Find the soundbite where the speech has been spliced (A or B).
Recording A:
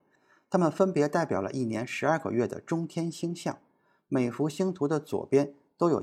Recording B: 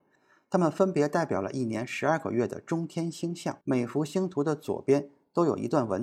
B